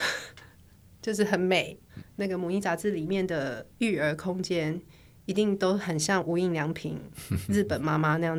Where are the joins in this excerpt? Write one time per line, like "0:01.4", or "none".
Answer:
none

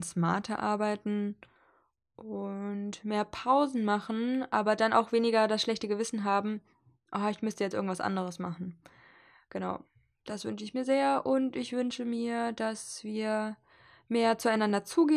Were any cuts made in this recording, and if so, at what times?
none

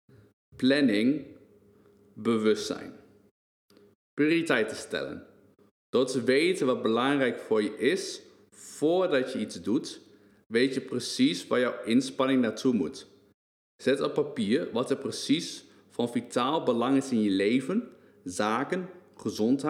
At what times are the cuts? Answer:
none

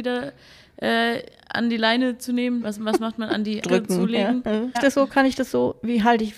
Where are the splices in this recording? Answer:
0:02.6
0:03.6
0:04.7

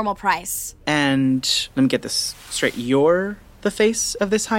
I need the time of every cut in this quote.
none

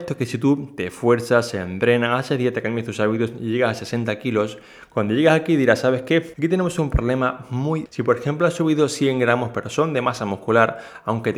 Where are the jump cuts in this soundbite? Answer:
0:06.3
0:07.9

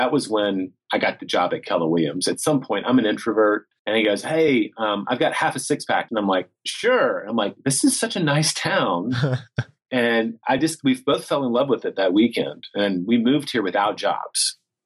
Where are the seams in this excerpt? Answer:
0:03.8
0:06.1

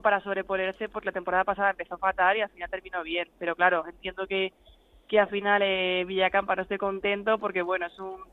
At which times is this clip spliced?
none

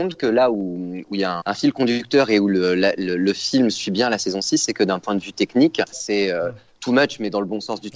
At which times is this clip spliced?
0:01.4
0:05.9

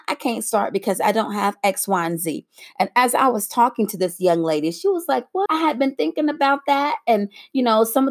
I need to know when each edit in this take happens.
0:05.5

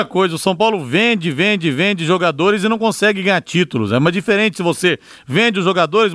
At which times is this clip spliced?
none

